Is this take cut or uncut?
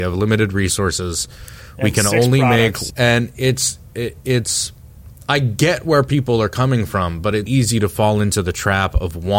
cut